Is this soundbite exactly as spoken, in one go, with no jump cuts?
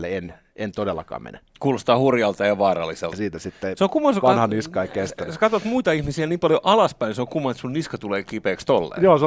no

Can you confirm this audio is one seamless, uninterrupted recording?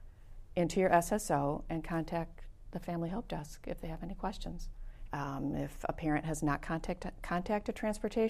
no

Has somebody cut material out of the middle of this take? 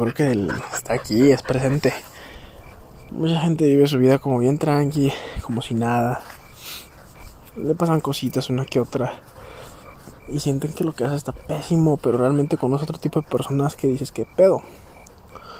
no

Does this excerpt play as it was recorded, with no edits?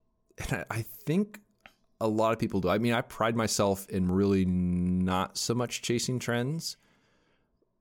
yes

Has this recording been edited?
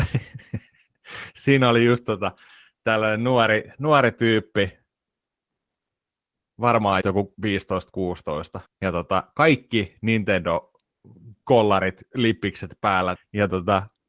yes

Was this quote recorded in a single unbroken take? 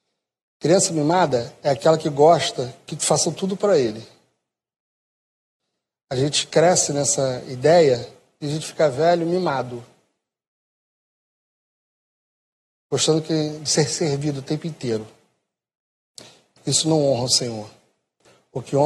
yes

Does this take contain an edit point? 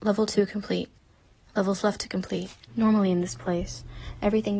yes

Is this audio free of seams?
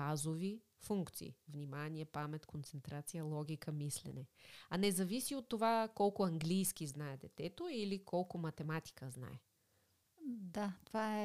yes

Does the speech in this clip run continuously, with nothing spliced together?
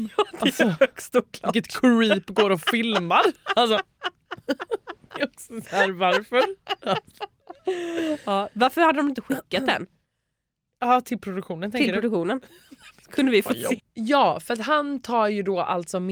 no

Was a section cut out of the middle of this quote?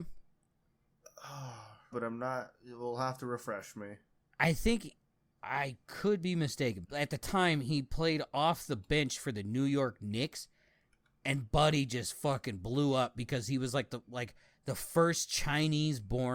yes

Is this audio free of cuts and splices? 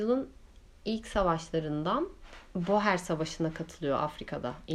yes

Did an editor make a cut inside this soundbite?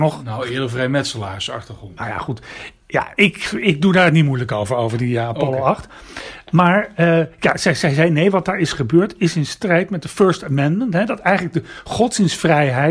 no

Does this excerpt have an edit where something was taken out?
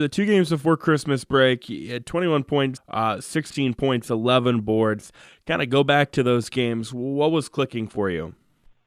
yes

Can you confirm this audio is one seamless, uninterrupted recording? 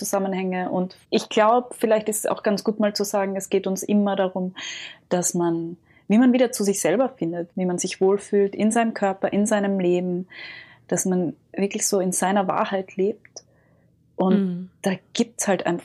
no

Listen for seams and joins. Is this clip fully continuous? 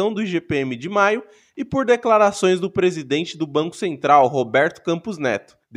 yes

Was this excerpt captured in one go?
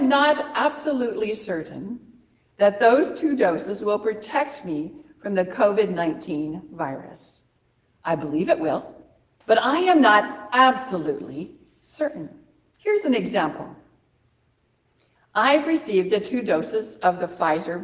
no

